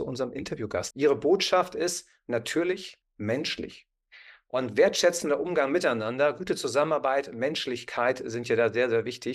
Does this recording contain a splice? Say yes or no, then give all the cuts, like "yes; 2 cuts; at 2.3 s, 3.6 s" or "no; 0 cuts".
yes; 2 cuts; at 0.9 s, 3.0 s